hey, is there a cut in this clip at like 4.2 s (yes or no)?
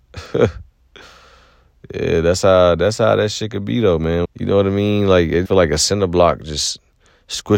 yes